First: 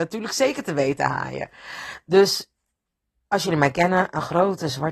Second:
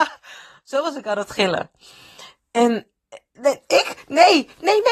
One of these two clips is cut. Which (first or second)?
second